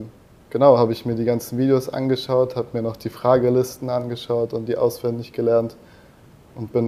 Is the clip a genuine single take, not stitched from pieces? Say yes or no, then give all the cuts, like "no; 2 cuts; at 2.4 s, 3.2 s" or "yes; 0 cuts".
yes; 0 cuts